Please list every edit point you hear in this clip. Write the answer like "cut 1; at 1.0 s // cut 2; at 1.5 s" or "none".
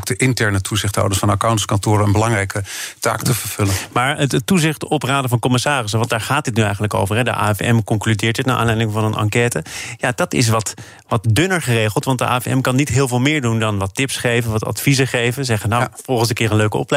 none